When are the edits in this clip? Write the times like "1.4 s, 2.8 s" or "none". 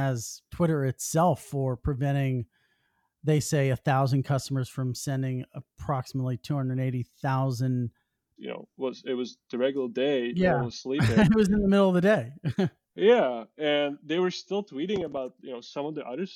8.4 s